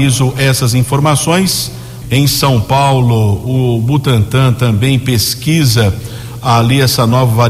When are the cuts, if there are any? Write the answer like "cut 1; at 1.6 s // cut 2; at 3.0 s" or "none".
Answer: cut 1; at 2.0 s